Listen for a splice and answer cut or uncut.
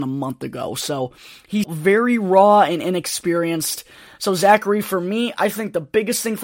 cut